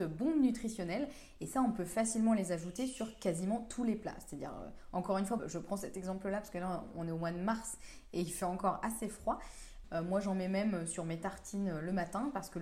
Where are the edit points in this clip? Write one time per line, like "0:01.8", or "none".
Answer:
0:05.4
0:09.8